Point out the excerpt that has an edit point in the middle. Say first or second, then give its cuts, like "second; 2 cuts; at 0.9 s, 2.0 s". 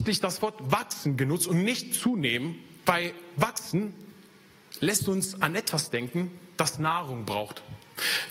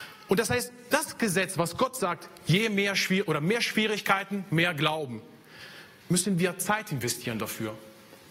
second; 2 cuts; at 0.9 s, 6.0 s